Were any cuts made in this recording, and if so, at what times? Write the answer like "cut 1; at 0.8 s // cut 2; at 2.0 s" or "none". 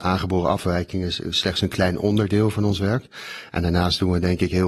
none